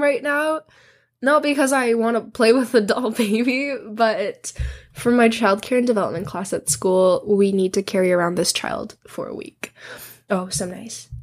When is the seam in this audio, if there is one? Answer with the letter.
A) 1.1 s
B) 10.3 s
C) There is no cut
B